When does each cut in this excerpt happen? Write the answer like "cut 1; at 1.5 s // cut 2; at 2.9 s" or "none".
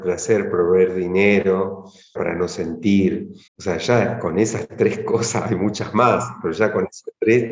cut 1; at 2.2 s // cut 2; at 3.5 s